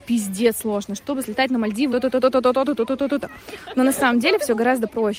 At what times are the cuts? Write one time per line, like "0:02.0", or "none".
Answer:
0:01.9
0:03.2